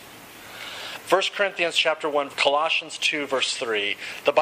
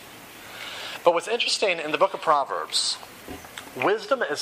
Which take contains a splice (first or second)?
first